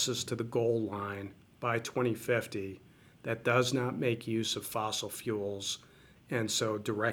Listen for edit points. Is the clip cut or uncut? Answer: uncut